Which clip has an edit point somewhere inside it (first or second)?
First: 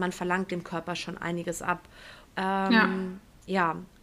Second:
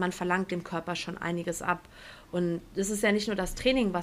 first